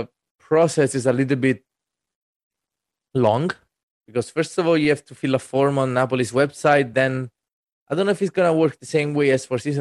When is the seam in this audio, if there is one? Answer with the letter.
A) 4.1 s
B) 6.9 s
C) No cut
C